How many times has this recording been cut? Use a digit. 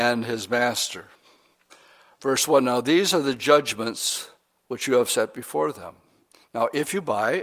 0